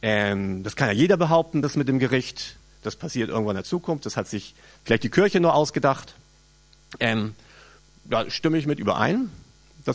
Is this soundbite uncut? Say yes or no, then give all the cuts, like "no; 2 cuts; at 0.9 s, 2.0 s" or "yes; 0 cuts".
yes; 0 cuts